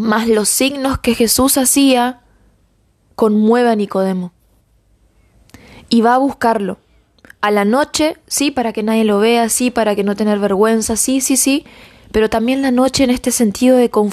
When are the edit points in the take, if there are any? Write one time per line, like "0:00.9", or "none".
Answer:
none

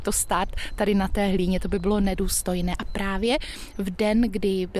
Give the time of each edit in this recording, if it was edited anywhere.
none

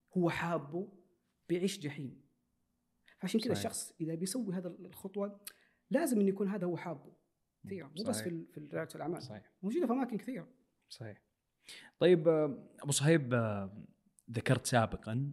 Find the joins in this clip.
0:07.7

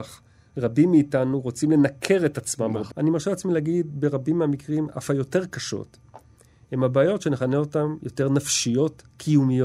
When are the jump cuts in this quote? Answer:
0:02.9

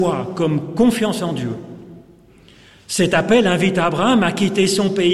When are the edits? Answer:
none

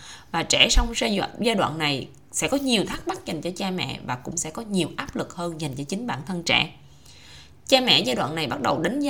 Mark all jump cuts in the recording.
none

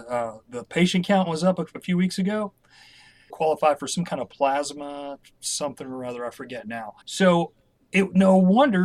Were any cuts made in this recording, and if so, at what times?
0:03.3
0:07.0

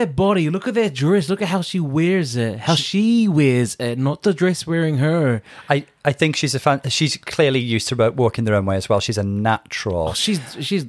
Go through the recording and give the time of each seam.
none

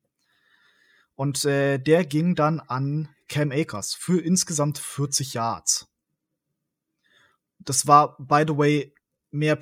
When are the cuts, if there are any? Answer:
none

